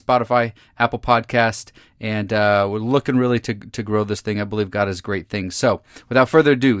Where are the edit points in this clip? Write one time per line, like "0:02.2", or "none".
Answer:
none